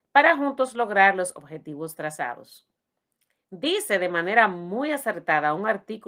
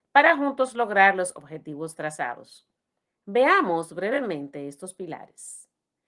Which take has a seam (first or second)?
second